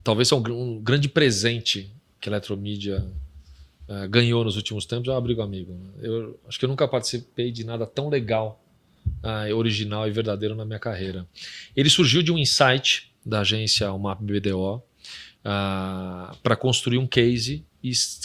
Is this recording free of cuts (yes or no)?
yes